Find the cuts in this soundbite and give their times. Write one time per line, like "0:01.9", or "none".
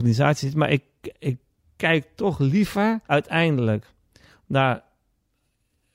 0:03.0